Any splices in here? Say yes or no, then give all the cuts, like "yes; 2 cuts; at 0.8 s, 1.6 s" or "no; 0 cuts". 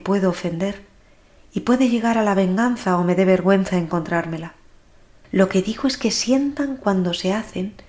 yes; 1 cut; at 5.2 s